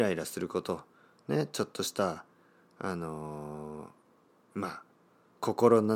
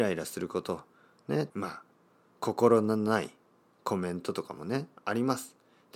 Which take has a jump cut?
second; 1 cut; at 1.5 s

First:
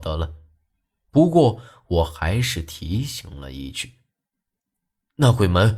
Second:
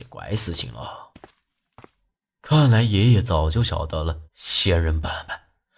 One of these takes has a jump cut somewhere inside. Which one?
second; 1 cut; at 4.2 s

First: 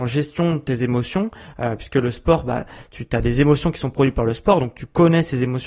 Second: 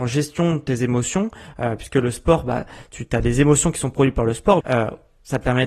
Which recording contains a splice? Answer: second; 1 cut; at 4.6 s

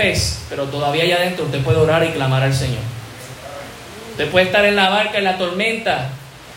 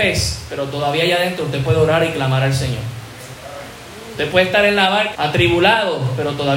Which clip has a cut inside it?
second; 1 cut; at 5.1 s

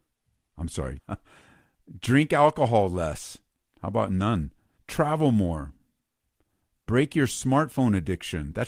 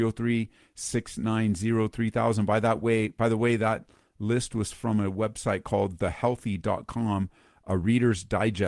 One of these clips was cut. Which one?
first; 2 cuts; at 1.0 s, 4.8 s

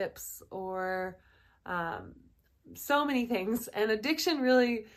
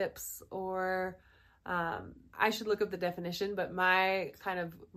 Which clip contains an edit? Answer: second; 1 cut; at 2.3 s

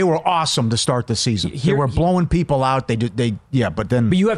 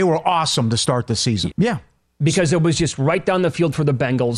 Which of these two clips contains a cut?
second; 1 cut; at 1.5 s

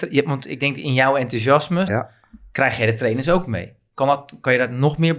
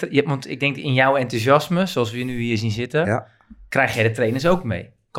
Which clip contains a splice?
first; 1 cut; at 1.9 s

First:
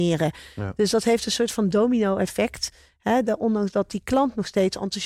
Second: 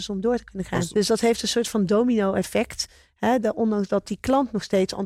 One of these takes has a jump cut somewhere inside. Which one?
second; 1 cut; at 0.9 s

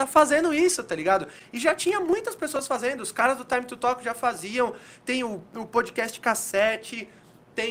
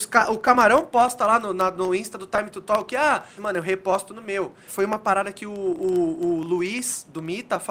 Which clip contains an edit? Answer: second; 2 cuts; at 3.4 s, 4.7 s

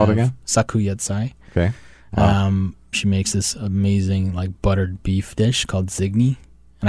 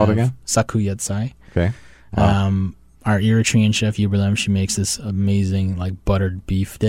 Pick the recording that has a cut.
first; 1 cut; at 2.9 s

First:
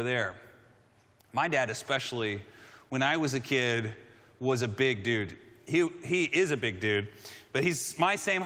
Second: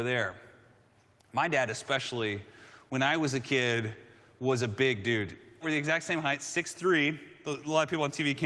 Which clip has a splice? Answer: second; 1 cut; at 5.6 s

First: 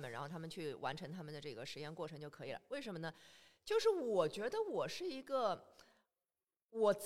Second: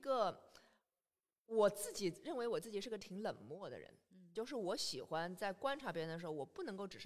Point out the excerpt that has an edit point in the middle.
second; 1 cut; at 4.3 s

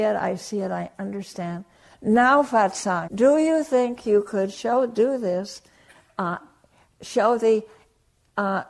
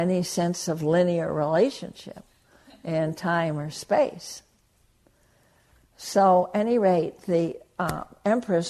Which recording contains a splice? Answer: first; 1 cut; at 3.1 s

